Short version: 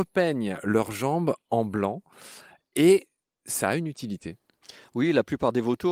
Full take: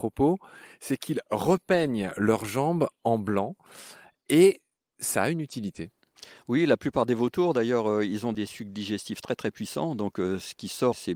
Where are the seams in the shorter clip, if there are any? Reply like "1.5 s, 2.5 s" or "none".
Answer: none